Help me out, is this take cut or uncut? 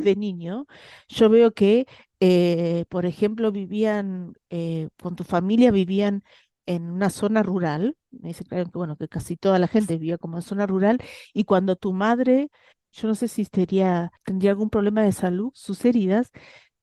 cut